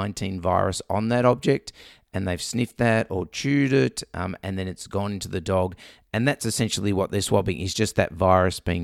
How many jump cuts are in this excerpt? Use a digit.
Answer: 0